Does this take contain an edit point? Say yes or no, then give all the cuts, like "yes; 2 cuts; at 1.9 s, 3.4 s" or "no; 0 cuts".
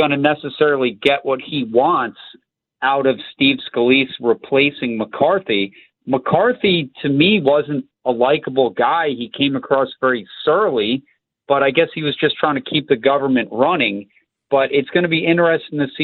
no; 0 cuts